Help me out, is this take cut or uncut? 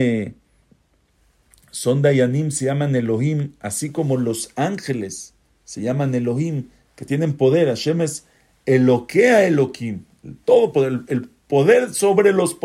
uncut